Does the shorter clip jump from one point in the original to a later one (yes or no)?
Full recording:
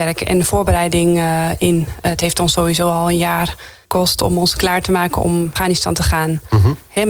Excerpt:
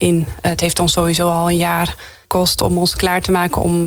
no